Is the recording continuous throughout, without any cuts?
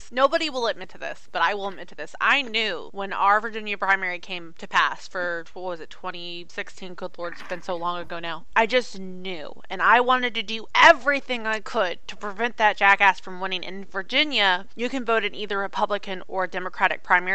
no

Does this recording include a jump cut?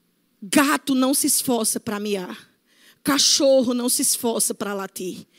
no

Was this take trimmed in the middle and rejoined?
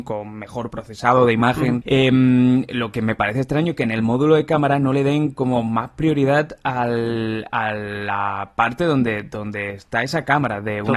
yes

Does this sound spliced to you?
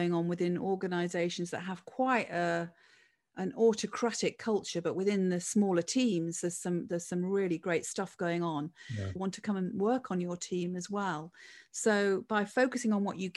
yes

